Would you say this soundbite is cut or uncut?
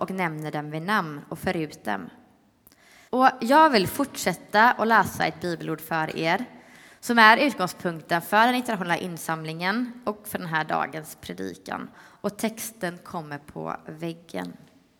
cut